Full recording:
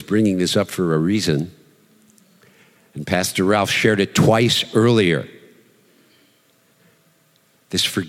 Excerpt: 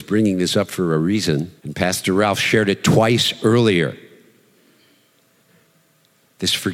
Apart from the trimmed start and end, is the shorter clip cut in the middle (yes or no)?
yes